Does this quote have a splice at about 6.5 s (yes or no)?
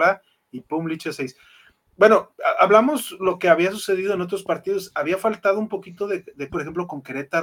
yes